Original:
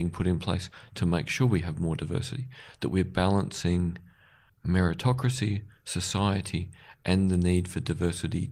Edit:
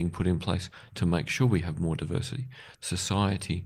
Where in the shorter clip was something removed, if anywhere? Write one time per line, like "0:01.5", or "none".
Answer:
0:02.7